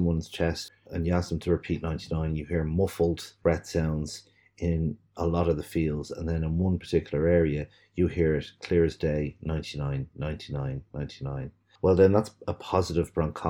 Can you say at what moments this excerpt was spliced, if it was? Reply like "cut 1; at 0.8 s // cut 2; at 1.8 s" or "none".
none